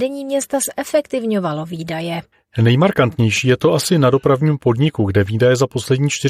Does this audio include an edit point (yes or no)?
no